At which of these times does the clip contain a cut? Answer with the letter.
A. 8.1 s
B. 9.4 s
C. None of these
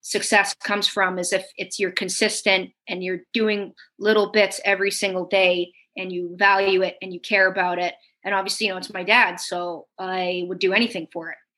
C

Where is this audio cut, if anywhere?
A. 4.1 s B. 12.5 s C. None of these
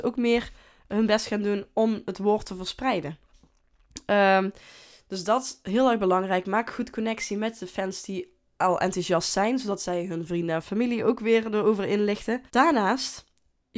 B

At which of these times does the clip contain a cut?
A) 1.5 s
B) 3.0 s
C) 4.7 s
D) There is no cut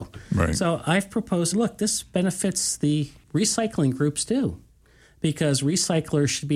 A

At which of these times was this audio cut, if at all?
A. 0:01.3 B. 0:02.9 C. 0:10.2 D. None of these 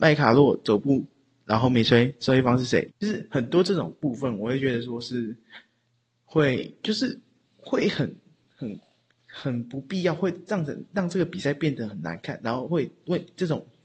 B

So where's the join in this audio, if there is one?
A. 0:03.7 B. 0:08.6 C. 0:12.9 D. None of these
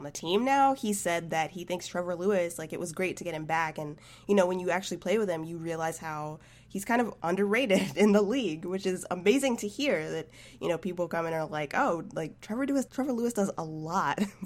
C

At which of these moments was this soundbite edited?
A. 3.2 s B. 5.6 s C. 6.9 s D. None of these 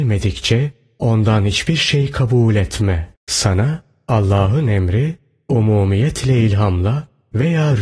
A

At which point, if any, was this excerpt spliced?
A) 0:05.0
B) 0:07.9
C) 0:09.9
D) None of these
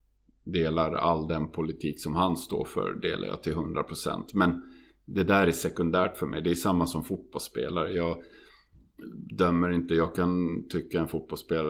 D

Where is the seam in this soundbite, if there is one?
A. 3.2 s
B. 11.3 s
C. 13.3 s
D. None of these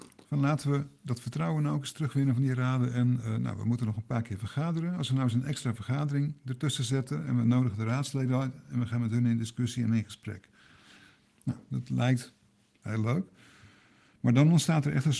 D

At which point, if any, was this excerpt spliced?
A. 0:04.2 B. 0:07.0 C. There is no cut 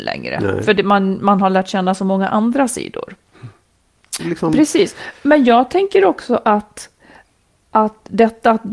A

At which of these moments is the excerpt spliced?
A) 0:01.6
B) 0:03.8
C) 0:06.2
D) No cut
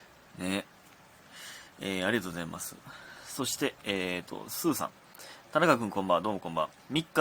D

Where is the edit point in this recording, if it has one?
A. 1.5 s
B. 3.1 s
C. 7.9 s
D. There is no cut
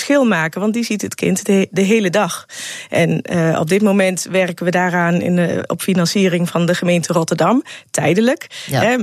D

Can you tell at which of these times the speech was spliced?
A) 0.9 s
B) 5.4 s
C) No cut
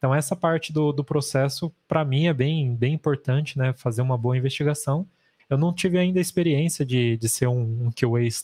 B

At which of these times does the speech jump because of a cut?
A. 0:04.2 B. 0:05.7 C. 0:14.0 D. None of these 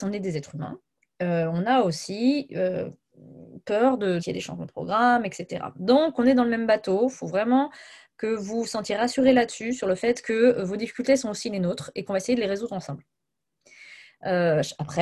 A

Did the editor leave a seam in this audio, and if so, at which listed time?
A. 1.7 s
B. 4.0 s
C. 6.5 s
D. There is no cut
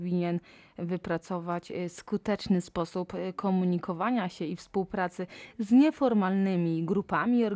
D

